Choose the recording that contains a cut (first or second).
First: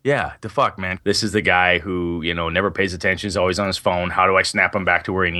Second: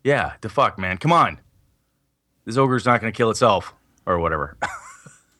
first